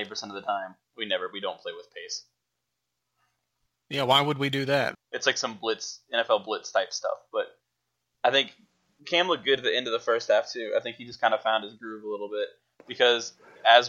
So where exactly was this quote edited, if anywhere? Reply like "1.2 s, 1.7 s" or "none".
4.9 s

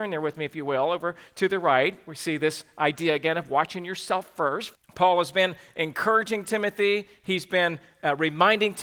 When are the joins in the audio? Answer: 4.8 s

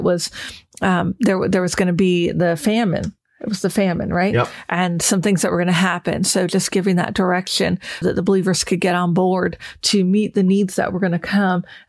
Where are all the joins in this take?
8.0 s

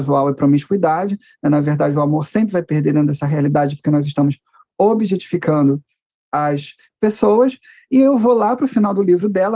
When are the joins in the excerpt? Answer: none

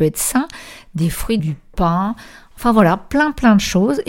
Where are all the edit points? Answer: 1.4 s

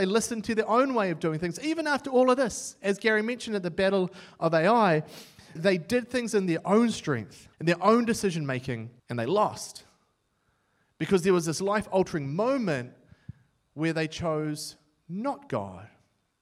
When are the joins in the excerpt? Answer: 5.6 s, 7.5 s, 9.0 s

